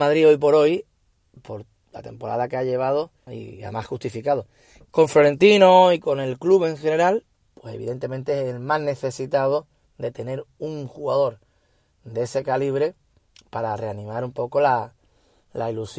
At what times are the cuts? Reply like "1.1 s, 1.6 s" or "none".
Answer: 3.3 s, 4.9 s